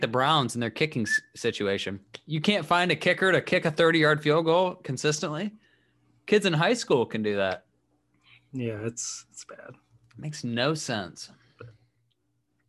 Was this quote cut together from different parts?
no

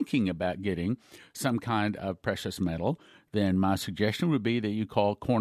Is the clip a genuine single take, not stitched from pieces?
yes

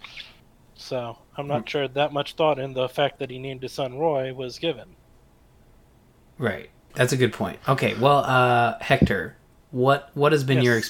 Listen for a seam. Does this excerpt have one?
yes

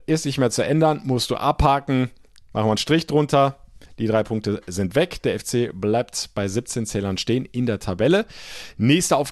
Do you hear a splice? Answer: no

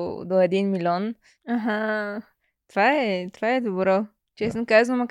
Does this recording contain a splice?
yes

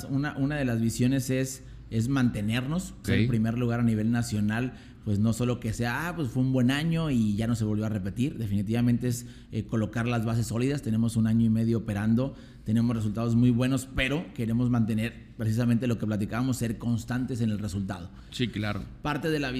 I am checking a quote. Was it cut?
yes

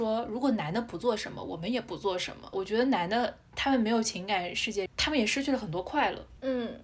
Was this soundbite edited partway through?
yes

